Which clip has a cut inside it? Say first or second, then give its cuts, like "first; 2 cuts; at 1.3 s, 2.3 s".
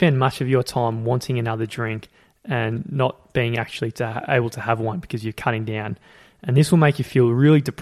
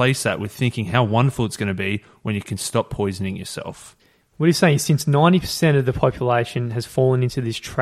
second; 1 cut; at 4.2 s